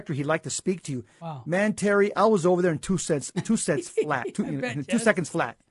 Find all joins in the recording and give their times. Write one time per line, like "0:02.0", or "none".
none

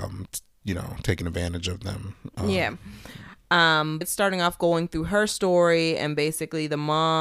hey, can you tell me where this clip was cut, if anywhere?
0:04.0

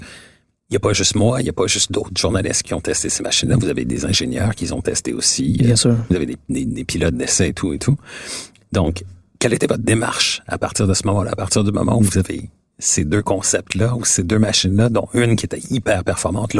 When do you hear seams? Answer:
none

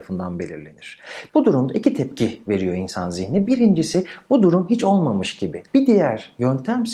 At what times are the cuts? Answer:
0:01.3
0:05.7

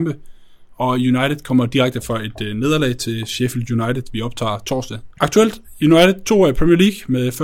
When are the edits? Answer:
0:05.1

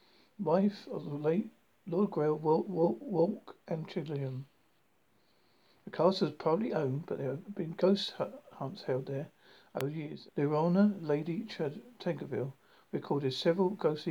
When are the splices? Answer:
0:10.3

